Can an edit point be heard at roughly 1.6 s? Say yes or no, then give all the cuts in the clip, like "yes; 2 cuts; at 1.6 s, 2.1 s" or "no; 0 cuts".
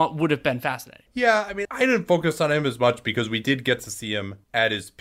yes; 1 cut; at 1.6 s